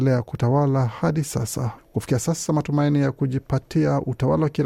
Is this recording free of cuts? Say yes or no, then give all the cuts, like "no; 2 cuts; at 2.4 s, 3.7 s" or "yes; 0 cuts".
no; 1 cut; at 1.8 s